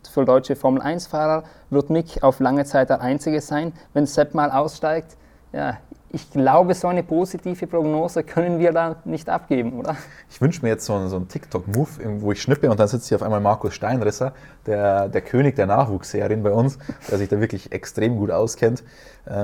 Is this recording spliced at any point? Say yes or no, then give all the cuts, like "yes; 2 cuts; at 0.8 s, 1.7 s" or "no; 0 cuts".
no; 0 cuts